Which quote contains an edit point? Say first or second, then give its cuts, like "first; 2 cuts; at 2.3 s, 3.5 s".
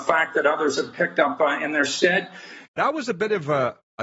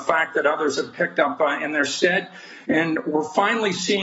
first; 1 cut; at 2.7 s